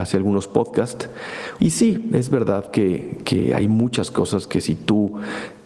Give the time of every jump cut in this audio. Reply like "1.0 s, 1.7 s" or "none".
1.6 s